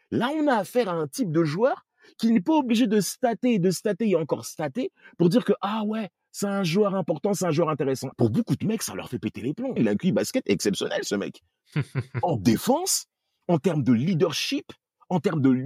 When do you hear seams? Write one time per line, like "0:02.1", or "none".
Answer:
0:08.1
0:09.8